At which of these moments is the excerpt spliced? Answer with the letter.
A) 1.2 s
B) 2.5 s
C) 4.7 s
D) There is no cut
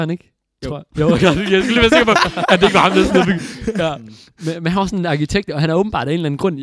D